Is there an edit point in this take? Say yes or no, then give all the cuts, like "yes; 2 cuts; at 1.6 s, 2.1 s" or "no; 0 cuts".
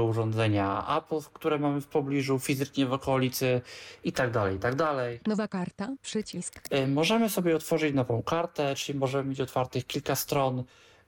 no; 0 cuts